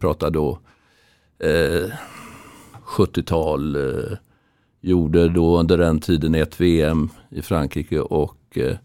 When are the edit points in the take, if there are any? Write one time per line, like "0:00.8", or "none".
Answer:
none